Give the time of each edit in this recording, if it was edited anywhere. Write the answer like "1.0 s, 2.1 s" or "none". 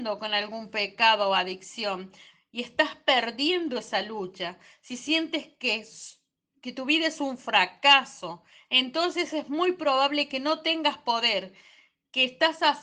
none